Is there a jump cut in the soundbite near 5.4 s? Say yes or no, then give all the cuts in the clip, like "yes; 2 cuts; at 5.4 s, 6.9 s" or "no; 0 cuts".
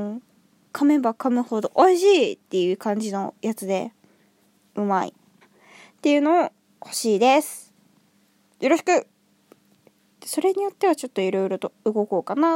yes; 1 cut; at 5.4 s